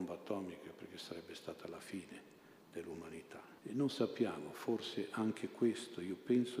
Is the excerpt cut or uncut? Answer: cut